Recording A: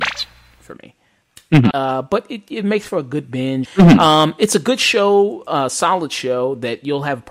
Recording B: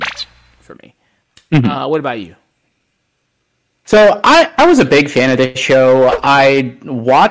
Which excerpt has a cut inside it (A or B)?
A